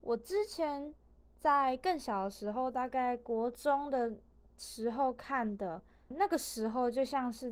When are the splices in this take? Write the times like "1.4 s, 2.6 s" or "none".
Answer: 6.1 s